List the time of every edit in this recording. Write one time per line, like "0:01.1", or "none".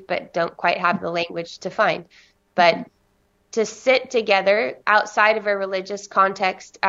none